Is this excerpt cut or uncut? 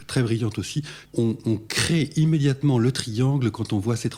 cut